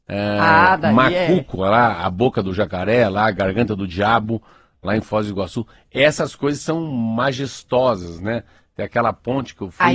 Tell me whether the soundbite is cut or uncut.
uncut